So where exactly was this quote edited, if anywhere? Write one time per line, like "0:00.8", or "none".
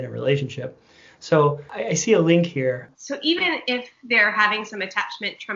0:02.9